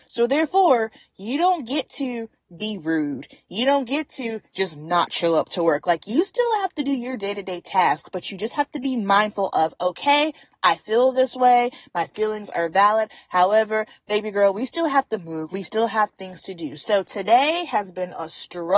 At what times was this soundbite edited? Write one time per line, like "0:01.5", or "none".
0:10.5